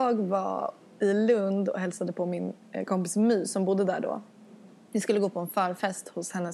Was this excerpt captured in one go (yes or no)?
no